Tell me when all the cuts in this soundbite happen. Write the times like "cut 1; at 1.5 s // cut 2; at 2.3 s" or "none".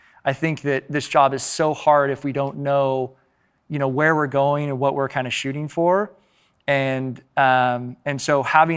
none